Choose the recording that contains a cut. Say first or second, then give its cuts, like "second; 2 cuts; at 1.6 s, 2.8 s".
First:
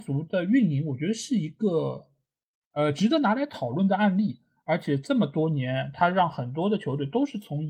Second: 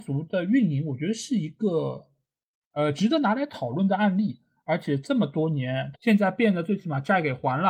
second; 1 cut; at 5.9 s